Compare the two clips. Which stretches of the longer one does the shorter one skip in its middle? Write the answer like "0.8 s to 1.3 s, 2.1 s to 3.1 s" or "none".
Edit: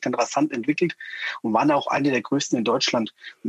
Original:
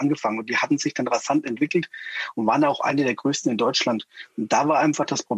none